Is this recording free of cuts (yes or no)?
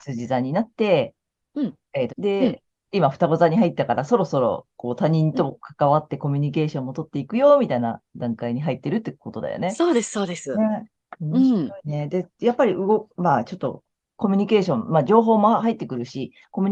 no